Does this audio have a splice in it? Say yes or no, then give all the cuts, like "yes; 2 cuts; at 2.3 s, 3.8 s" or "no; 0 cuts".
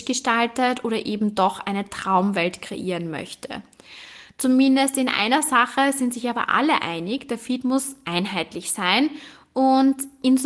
no; 0 cuts